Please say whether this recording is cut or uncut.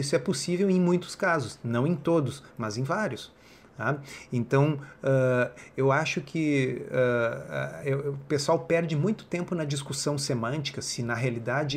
cut